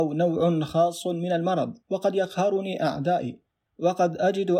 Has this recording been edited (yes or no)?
yes